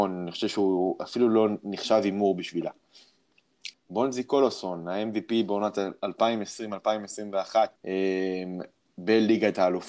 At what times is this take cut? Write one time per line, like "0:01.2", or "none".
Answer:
0:03.7
0:07.8